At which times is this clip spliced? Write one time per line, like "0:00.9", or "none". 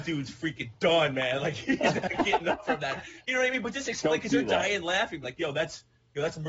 0:05.2